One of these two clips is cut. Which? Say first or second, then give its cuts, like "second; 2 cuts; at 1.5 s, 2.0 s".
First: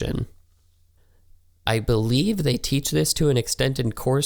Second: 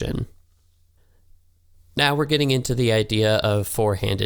first; 1 cut; at 1.7 s